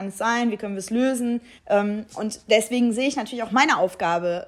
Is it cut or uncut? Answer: cut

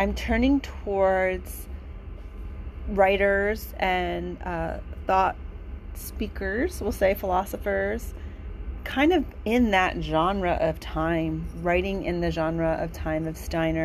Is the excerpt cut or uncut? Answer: uncut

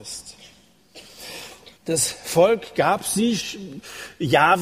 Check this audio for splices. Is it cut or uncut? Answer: cut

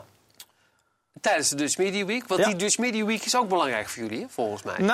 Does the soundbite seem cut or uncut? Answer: uncut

